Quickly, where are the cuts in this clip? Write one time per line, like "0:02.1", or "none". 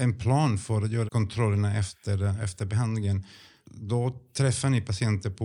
0:01.1
0:03.6